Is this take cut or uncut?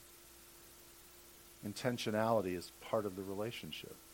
uncut